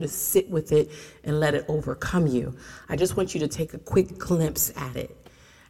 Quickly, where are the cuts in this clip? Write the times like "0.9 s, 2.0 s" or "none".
none